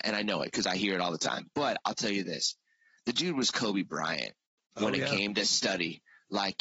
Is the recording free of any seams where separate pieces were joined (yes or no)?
yes